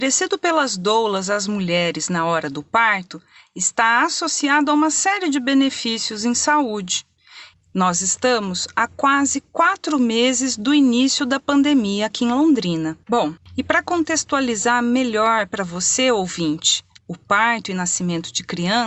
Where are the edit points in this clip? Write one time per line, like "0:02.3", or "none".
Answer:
0:07.5
0:13.0
0:17.0